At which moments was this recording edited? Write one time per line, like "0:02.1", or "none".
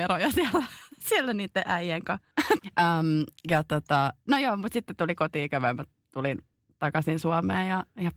0:02.6